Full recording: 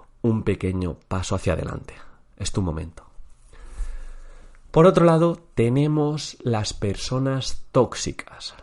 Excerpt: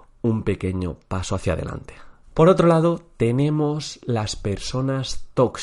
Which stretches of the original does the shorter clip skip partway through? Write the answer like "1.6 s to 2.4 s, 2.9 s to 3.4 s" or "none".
2.2 s to 4.6 s